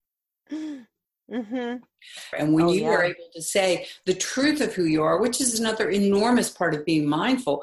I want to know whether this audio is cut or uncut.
cut